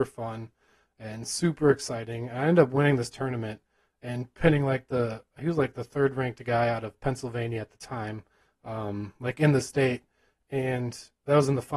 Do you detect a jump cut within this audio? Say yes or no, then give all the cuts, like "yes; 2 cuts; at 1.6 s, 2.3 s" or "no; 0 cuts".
no; 0 cuts